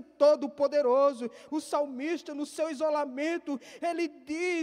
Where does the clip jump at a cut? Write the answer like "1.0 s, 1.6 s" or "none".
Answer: 1.5 s